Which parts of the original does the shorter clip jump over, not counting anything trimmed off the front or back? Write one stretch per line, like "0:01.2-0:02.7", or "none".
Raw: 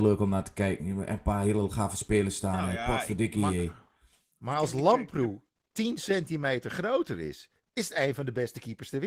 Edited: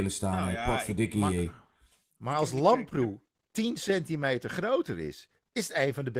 none